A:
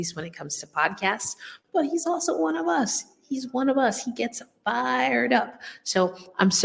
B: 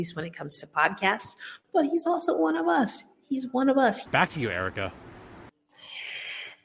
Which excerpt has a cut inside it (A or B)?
B